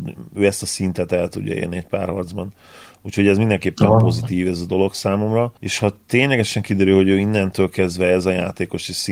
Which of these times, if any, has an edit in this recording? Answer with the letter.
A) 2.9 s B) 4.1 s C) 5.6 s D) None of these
C